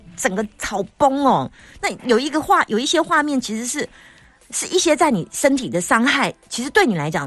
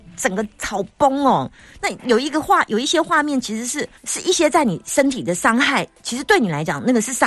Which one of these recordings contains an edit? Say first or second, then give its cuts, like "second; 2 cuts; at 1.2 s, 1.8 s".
second; 1 cut; at 4.0 s